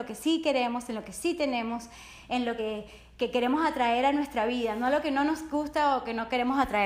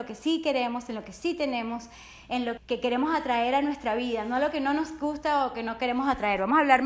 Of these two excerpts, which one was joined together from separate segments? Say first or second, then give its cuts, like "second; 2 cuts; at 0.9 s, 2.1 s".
second; 1 cut; at 2.6 s